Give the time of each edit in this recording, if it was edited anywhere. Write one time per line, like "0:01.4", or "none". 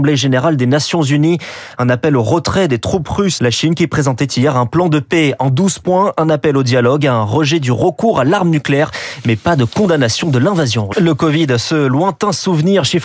0:03.4
0:10.9